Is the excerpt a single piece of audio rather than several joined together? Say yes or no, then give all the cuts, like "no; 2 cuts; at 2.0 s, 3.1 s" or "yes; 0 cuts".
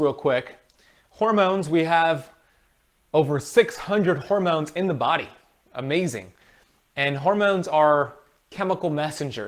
yes; 0 cuts